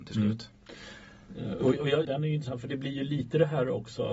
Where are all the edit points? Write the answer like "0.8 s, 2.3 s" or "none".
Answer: 2.1 s